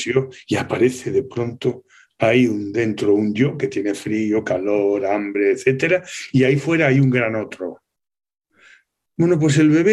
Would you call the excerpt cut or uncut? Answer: uncut